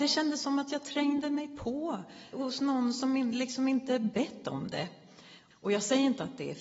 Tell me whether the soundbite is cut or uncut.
cut